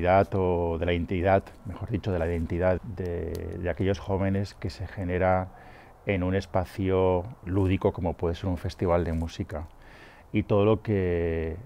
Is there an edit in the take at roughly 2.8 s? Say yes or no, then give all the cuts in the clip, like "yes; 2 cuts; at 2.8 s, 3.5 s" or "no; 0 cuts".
no; 0 cuts